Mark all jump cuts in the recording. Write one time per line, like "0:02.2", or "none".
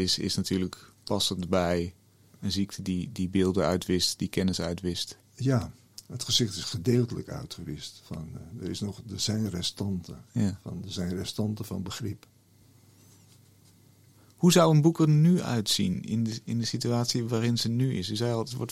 none